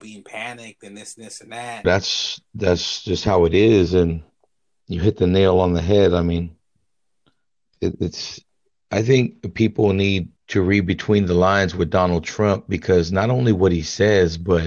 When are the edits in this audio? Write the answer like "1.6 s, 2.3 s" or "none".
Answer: 1.8 s, 10.4 s